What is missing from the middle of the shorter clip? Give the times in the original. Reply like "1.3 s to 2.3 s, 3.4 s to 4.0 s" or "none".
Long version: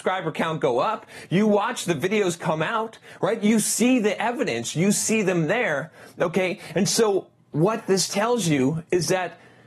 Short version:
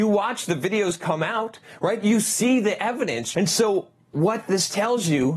4.7 s to 6.7 s